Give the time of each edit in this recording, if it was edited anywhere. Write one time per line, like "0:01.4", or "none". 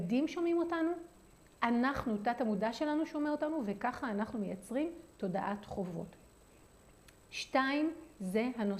none